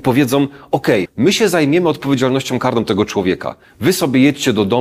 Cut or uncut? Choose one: cut